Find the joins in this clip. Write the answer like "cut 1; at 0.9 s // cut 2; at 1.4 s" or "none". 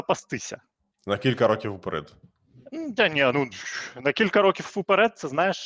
none